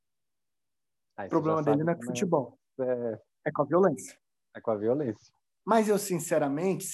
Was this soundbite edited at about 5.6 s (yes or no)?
yes